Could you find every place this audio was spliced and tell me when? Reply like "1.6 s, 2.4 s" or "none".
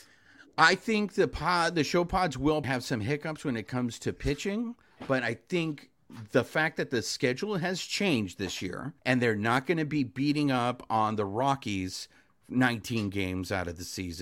2.6 s, 9.0 s